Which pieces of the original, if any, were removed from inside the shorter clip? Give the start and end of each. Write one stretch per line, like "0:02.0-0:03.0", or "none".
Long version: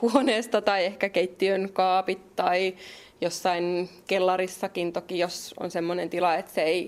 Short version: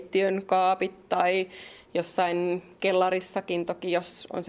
none